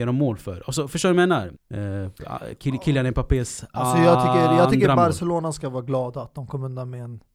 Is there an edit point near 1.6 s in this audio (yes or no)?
yes